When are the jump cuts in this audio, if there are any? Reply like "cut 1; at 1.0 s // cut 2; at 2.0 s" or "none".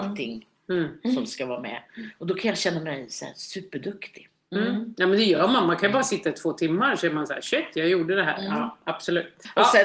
none